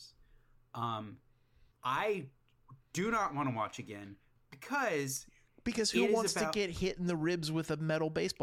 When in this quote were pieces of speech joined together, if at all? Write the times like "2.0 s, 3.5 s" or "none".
1.7 s

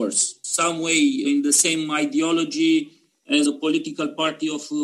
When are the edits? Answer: 1.2 s, 3.4 s

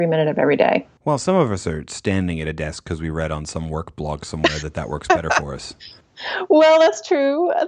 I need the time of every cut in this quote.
none

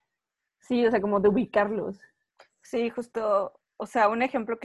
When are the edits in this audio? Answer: none

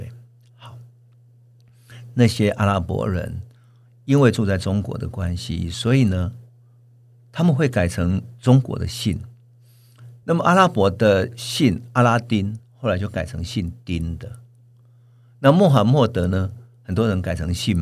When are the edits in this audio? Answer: none

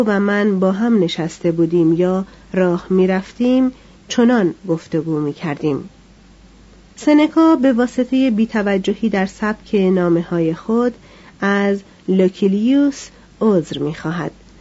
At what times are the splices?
6.9 s

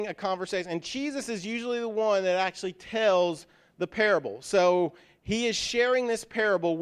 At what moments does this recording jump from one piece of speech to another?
none

